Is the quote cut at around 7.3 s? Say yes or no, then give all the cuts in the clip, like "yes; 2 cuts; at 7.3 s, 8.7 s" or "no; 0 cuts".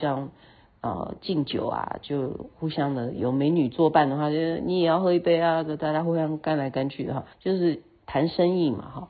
yes; 1 cut; at 7.3 s